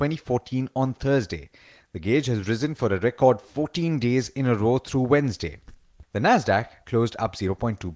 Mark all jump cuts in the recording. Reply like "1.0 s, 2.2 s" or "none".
6.0 s